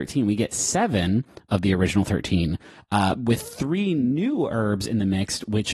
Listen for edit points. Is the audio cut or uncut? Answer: uncut